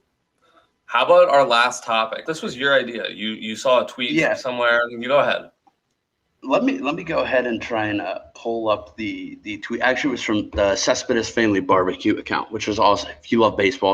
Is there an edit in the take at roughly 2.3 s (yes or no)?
yes